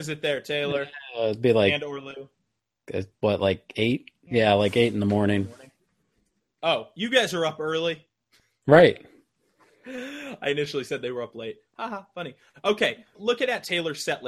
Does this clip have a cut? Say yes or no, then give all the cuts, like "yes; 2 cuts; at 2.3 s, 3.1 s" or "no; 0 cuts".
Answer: yes; 2 cuts; at 4.3 s, 13.1 s